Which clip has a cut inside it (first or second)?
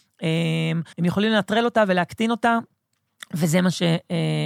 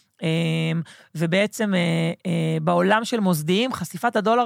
first